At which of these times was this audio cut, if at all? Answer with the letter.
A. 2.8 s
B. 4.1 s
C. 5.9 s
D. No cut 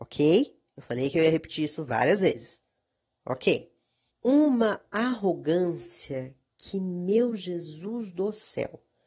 B